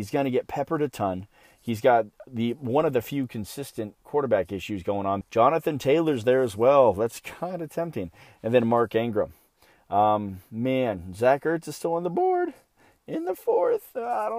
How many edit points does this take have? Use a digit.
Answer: 1